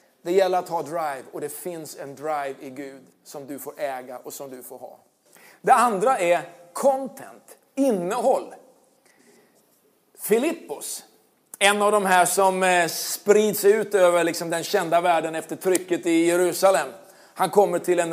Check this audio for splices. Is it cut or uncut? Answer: uncut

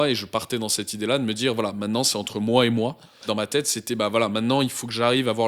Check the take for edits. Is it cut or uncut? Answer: cut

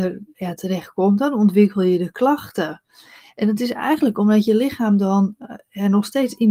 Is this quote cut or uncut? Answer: uncut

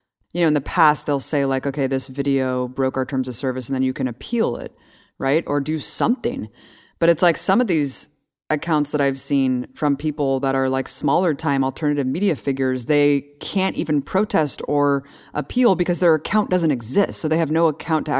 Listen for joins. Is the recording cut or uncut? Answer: uncut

